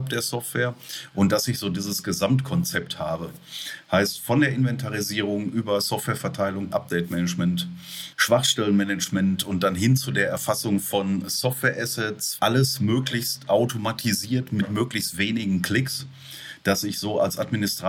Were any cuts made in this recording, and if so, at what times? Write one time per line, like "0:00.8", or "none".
0:06.7
0:12.4